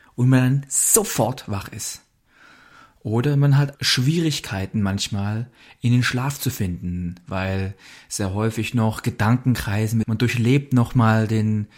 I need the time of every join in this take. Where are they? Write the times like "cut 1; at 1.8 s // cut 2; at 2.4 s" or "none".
cut 1; at 3.8 s // cut 2; at 10.0 s